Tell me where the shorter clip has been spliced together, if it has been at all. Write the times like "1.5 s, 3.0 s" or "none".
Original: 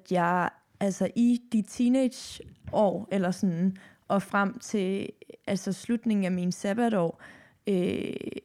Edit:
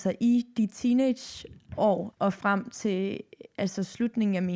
2.1 s